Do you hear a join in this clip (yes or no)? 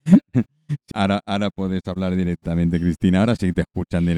yes